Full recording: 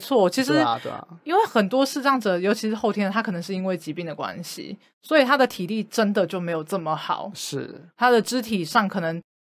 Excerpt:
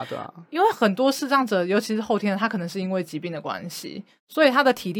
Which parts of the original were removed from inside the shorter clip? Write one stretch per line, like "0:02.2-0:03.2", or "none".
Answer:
none